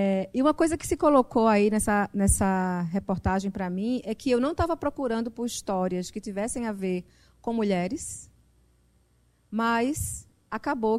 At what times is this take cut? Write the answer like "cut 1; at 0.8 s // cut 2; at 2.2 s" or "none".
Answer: none